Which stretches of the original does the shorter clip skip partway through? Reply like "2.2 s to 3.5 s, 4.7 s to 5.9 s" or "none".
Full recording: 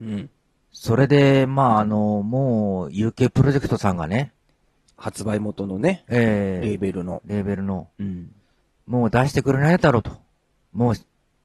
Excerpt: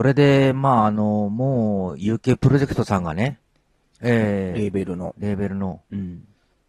4.9 s to 6.1 s